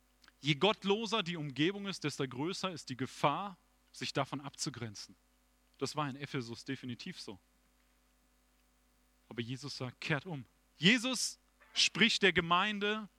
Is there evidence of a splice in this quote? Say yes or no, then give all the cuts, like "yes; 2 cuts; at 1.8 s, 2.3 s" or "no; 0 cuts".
yes; 1 cut; at 10.7 s